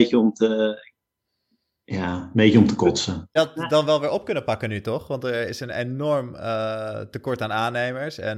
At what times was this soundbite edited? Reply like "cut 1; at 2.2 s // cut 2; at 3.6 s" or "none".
cut 1; at 3.4 s